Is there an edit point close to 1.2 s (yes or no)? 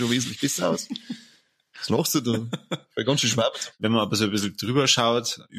no